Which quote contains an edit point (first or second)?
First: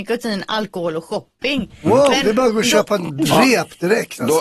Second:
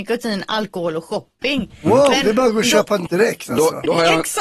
second